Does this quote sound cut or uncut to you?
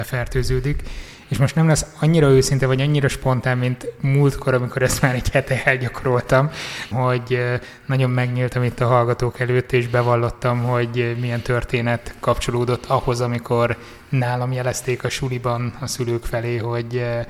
cut